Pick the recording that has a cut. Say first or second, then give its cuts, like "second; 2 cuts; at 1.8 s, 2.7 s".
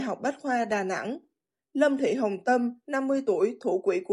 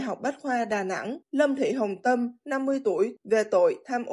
second; 2 cuts; at 1.2 s, 3.2 s